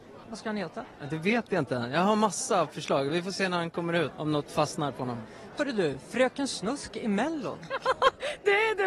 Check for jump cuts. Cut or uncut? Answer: uncut